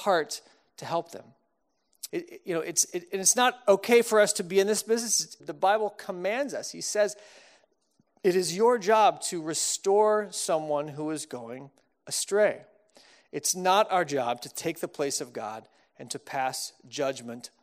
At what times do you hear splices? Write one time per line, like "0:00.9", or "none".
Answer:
0:02.1
0:05.4